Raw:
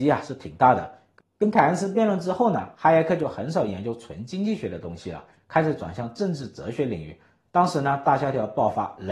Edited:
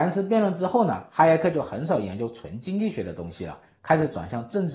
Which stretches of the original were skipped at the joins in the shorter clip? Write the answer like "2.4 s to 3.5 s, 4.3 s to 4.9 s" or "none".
none